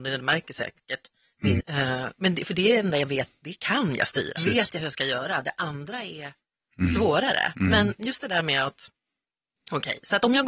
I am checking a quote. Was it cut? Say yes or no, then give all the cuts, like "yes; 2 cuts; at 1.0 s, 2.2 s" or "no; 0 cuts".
yes; 2 cuts; at 1.6 s, 4.4 s